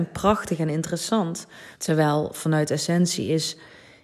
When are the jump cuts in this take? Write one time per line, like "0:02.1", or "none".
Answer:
0:01.7